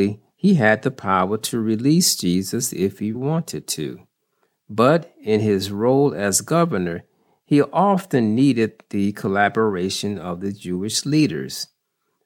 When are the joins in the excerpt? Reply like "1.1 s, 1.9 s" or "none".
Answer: 3.1 s